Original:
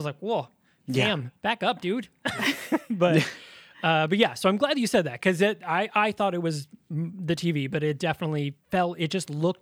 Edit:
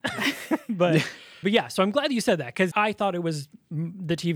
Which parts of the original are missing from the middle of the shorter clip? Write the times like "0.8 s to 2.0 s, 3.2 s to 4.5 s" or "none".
3.6 s to 4.1 s, 5.4 s to 5.9 s